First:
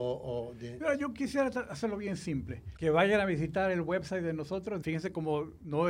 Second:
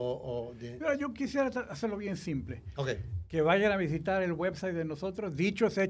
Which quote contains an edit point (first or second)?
first